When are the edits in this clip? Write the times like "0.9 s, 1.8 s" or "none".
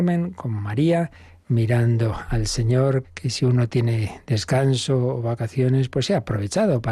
3.0 s